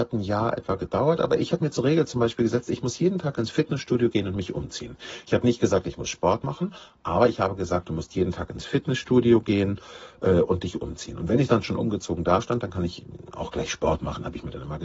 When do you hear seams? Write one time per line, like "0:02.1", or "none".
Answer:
none

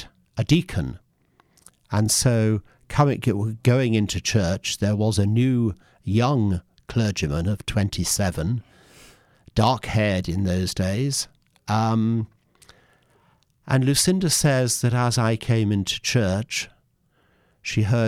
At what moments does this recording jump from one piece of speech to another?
none

